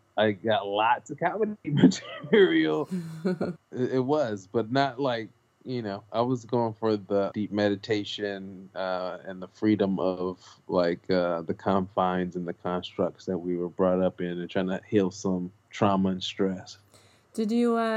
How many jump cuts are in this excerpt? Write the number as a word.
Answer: two